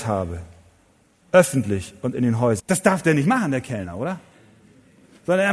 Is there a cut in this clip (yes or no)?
yes